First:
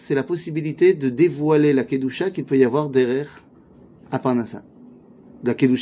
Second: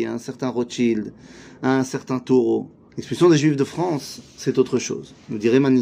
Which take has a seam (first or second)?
second